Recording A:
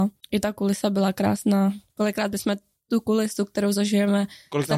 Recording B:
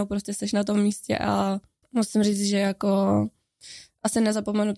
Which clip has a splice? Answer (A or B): A